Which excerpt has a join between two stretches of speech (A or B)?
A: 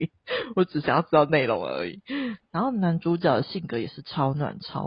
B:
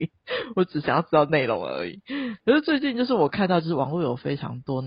A